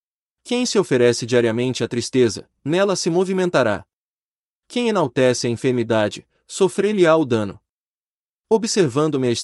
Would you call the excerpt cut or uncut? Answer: uncut